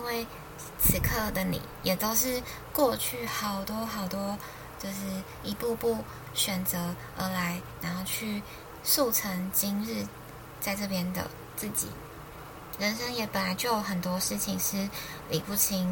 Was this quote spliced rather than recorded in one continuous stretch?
no; 0 cuts

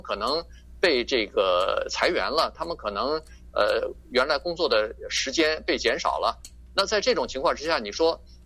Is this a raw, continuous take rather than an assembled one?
yes; 0 cuts

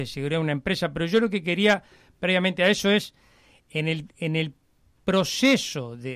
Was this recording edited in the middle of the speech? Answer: no; 0 cuts

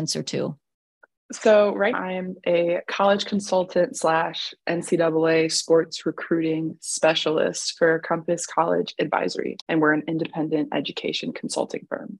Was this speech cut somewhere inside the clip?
yes; 2 cuts; at 1.9 s, 9.6 s

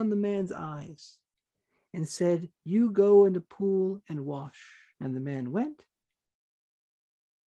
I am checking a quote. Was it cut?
yes; 1 cut; at 4.9 s

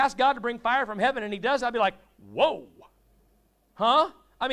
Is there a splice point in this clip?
no; 0 cuts

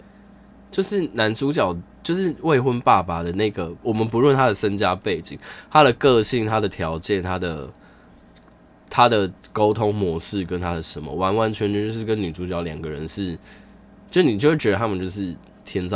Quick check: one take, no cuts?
yes; 0 cuts

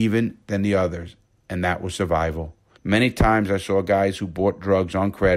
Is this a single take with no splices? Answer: no; 1 cut; at 2.8 s

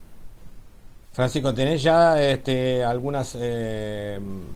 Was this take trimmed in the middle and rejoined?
yes; 1 cut; at 1.0 s

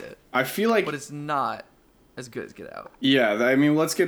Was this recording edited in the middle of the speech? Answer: no; 0 cuts

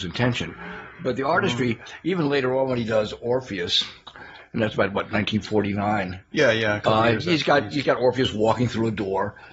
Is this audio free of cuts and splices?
yes; 0 cuts

